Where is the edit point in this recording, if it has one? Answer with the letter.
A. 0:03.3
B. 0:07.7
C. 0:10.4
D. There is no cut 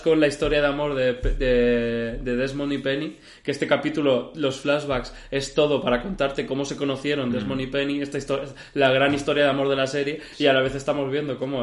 D